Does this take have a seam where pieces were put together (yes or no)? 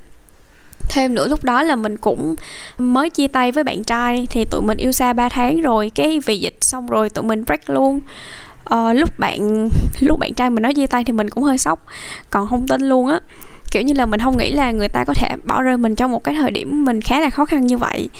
yes